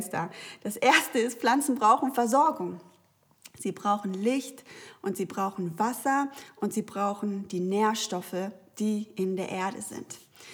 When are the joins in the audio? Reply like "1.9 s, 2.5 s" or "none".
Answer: none